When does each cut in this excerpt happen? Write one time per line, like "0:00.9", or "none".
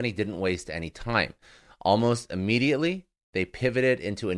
none